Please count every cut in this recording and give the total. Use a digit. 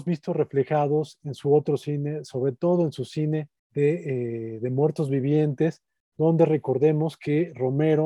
1